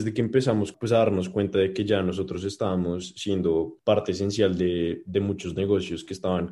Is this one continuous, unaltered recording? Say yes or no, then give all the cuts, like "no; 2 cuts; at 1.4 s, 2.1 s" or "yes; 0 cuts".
yes; 0 cuts